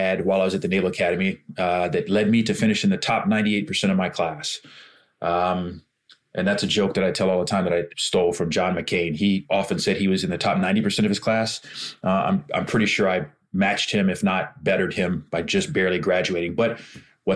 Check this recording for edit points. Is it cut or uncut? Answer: cut